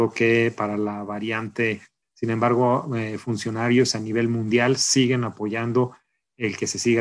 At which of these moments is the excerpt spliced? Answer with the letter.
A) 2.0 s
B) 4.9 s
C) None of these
A